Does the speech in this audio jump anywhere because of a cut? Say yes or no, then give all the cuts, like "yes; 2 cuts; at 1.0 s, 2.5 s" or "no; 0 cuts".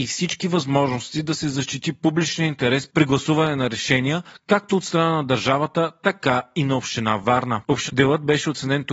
yes; 1 cut; at 7.9 s